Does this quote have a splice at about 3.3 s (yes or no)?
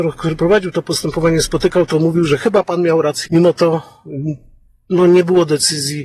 yes